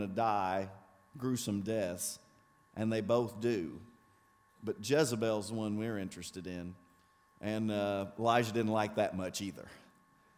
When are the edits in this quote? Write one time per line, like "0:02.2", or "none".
0:07.3